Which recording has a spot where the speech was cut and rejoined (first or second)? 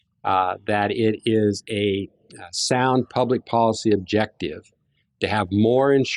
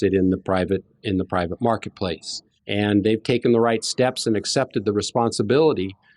second